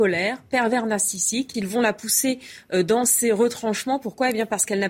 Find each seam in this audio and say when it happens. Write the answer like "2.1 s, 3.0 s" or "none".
1.5 s